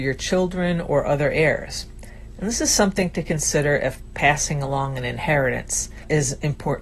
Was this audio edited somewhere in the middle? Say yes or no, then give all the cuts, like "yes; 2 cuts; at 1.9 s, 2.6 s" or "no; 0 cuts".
no; 0 cuts